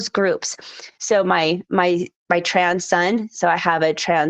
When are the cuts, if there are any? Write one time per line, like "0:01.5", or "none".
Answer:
0:01.0

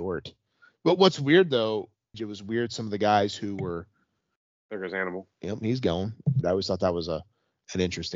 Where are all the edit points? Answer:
0:02.1
0:05.3
0:06.4

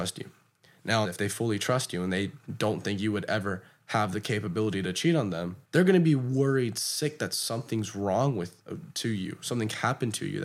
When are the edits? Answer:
0:01.0
0:05.6

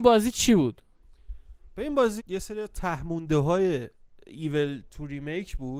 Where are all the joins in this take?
0:02.2

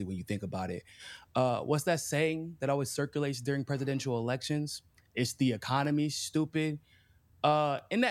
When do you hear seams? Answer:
none

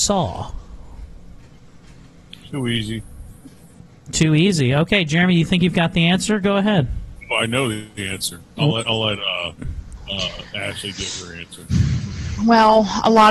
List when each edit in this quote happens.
none

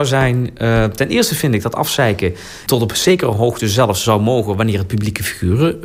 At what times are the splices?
0:02.7

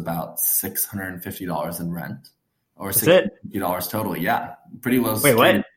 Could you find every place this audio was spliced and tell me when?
none

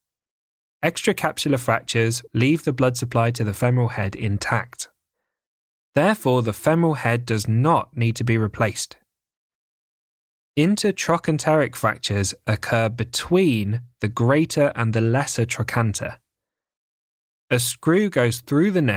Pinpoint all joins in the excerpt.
0:02.3
0:17.3

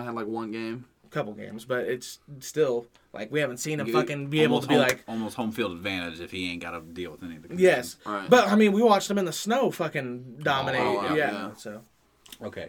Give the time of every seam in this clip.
none

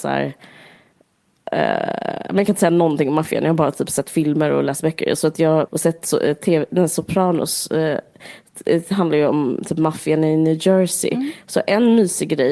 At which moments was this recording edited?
0:05.7

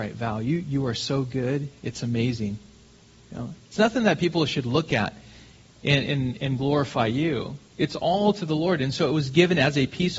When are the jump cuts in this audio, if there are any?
none

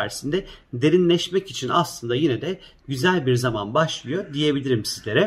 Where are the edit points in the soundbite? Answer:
none

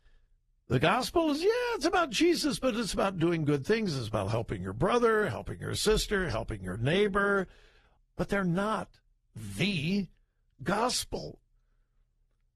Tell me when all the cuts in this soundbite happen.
0:08.0

